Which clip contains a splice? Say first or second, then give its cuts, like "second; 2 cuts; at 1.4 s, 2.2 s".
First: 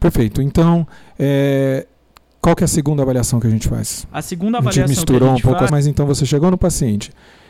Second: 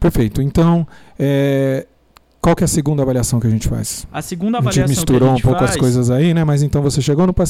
first; 1 cut; at 5.7 s